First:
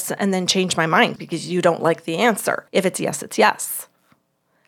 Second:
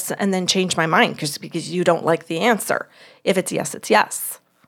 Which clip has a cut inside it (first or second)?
first